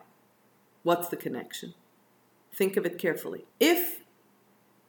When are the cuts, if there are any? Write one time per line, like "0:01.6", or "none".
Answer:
0:03.5